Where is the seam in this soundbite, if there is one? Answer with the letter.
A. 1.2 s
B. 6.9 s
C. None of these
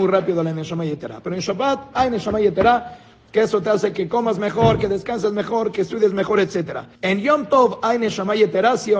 B